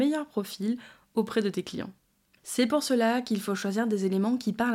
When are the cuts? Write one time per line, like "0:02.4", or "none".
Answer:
0:02.4